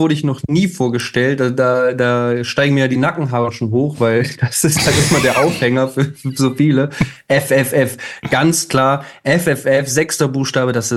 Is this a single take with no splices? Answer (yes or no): yes